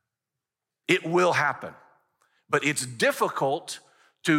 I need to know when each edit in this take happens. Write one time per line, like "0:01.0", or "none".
none